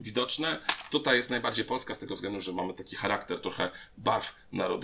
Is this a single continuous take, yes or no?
yes